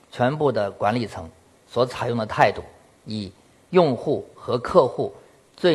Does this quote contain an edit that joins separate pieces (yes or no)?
yes